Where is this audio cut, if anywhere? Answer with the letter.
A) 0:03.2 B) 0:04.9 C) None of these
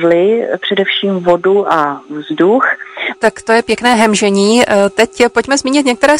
A